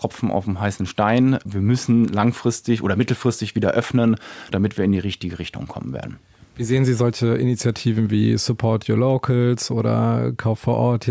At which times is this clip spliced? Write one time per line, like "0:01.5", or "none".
none